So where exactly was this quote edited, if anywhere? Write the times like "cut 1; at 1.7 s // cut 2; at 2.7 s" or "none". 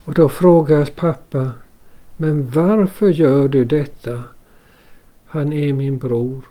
cut 1; at 5.1 s